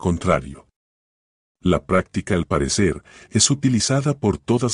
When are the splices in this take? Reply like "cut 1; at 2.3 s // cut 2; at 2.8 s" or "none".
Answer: none

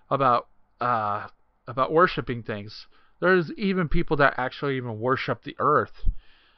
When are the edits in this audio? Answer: none

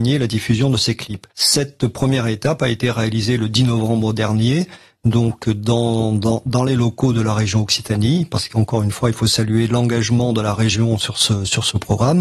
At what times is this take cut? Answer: none

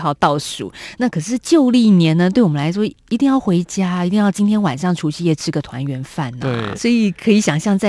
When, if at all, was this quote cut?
cut 1; at 6.7 s

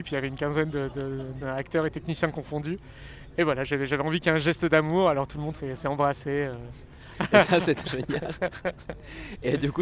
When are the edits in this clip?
cut 1; at 1.4 s // cut 2; at 7.8 s

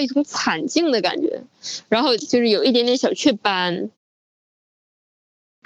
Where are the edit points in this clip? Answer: none

